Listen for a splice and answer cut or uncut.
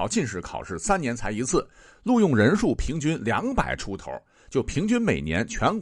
uncut